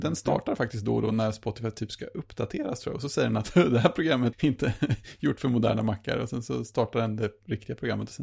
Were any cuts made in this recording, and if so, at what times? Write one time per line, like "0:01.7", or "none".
0:04.3